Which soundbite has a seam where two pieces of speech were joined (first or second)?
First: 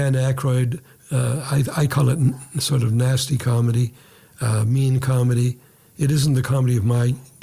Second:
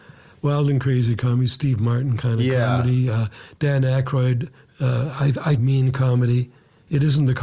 second